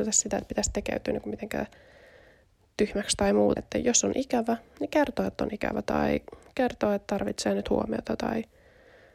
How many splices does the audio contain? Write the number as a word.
one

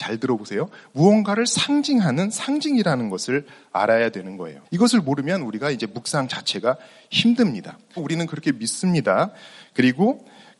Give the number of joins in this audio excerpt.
two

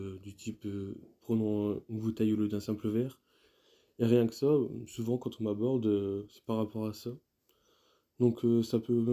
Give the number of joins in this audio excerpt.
zero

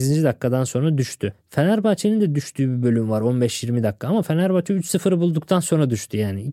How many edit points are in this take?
zero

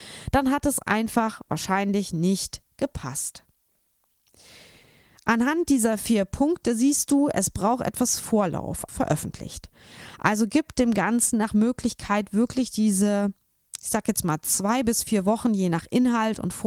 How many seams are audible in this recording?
one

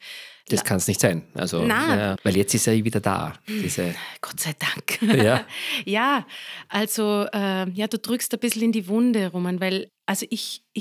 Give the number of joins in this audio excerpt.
two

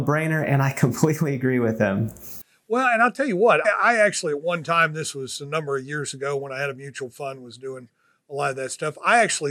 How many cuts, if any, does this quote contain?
one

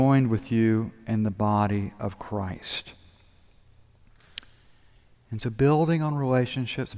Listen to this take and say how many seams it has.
zero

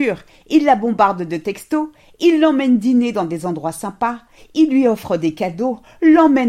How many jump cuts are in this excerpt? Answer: zero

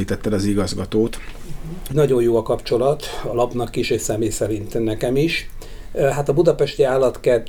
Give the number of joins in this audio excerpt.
one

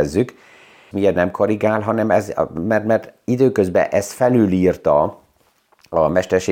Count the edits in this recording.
one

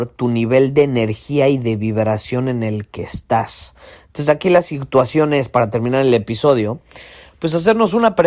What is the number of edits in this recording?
zero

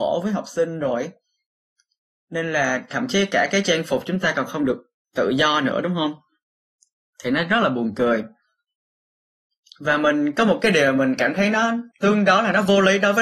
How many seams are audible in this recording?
one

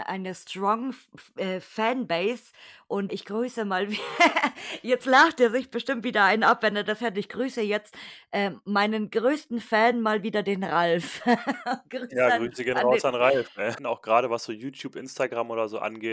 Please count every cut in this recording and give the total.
two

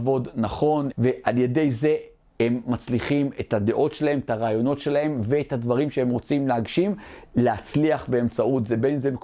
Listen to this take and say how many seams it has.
one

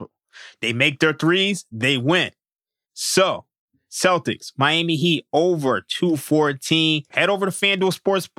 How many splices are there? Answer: two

